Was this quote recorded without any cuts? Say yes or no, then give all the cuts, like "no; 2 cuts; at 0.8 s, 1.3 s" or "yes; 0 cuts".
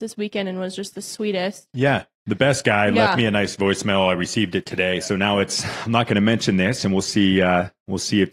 no; 1 cut; at 5.0 s